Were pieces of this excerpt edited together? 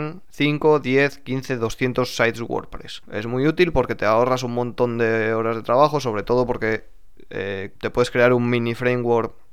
yes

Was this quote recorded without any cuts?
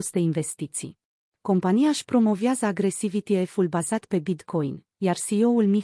no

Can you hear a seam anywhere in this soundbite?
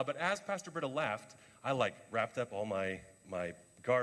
no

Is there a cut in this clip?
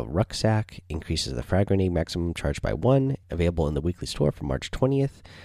yes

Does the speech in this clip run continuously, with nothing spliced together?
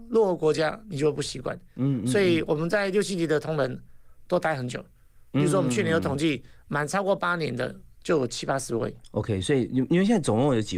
yes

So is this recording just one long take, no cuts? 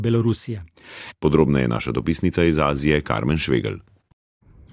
no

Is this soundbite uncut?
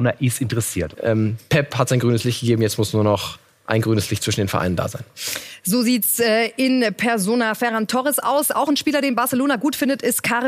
no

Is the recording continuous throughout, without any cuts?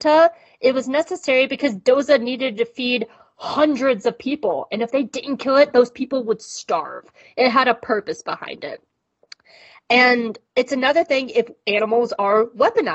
yes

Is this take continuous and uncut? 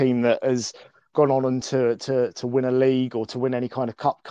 yes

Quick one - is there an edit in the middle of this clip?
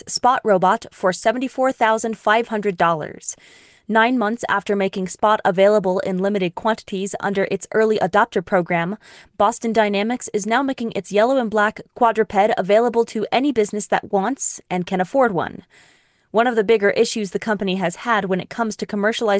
no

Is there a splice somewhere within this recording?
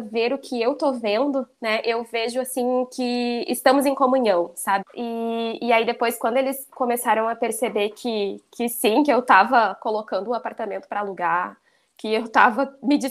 yes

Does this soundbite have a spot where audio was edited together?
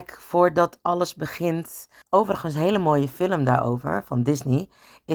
yes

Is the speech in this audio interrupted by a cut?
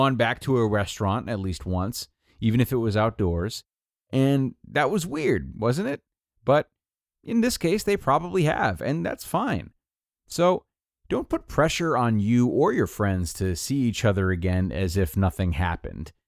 yes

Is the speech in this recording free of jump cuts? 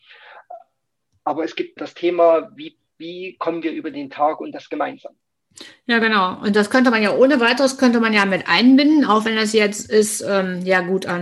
no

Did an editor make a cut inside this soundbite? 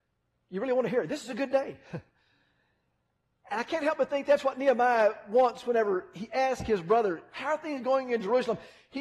no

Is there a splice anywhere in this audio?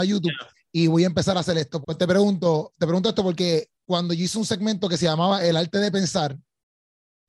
yes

